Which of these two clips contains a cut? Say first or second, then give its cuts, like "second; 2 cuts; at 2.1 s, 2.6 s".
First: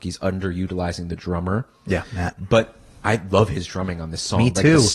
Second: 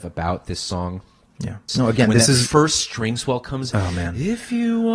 second; 1 cut; at 1.7 s